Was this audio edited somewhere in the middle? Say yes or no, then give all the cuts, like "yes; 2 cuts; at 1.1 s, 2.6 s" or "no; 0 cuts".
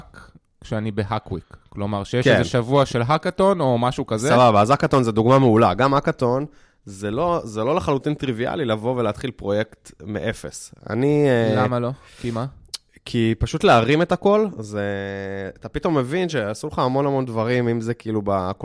no; 0 cuts